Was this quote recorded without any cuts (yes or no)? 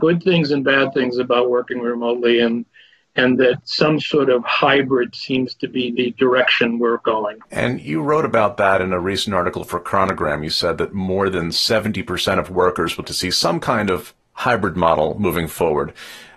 no